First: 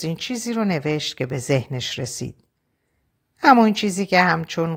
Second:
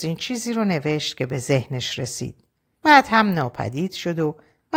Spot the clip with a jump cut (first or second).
second